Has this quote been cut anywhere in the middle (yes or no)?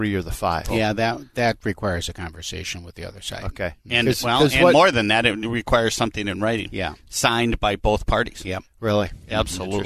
no